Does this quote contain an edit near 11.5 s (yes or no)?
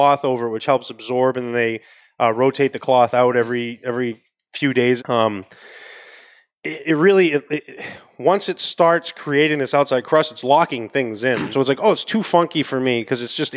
yes